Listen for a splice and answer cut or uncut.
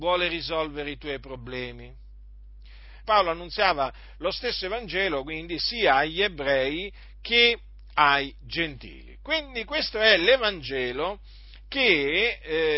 cut